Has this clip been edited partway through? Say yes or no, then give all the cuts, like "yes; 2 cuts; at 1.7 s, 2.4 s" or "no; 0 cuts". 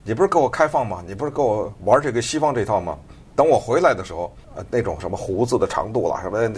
yes; 1 cut; at 4.4 s